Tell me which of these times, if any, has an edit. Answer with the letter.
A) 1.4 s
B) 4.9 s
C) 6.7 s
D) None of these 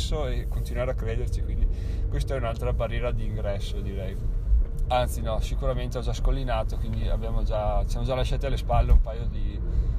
B